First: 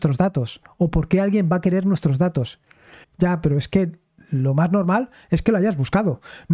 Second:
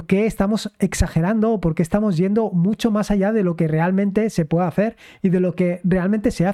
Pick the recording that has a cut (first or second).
first